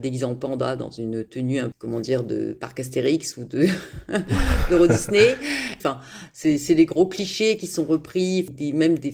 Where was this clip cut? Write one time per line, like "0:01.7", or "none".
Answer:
0:05.8